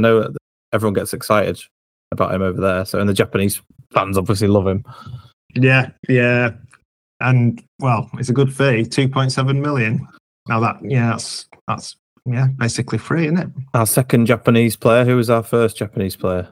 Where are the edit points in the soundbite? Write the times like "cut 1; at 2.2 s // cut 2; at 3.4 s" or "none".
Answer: none